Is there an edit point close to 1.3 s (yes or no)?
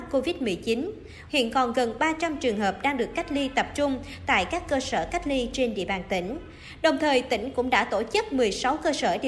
yes